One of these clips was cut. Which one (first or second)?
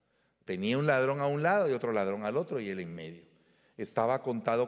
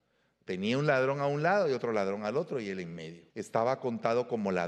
second